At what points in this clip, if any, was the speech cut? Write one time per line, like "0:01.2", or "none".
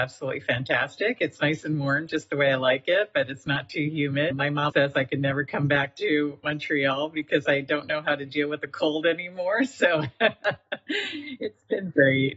0:04.7

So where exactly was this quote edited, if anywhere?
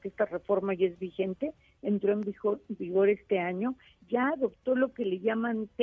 none

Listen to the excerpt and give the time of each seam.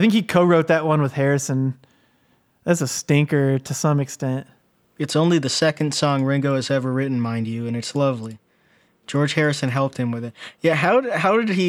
none

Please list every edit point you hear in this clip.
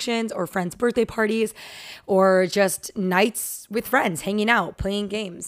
none

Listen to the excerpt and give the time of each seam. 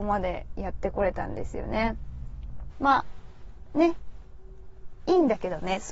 0:02.7

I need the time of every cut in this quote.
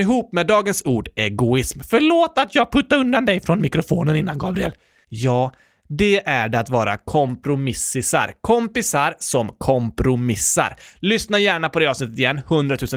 0:05.0

